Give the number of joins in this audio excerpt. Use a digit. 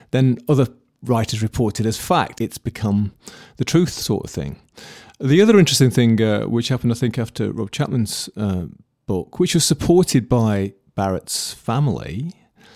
1